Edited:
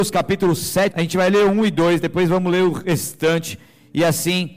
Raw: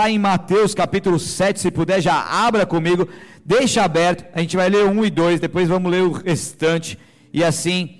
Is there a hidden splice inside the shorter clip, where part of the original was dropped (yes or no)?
yes